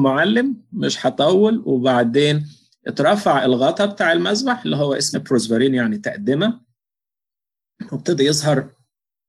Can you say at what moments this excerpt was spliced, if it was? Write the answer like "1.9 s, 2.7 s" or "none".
5.1 s